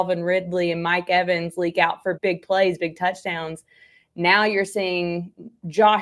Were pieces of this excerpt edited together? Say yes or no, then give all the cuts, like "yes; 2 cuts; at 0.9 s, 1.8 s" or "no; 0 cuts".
yes; 1 cut; at 2.2 s